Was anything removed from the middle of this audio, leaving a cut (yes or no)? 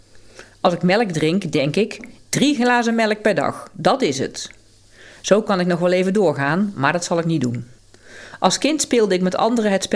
no